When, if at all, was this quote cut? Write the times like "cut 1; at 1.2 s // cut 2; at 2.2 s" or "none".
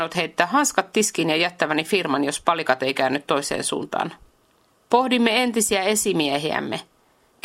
cut 1; at 4.8 s